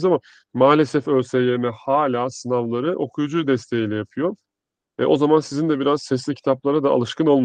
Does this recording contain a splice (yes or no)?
no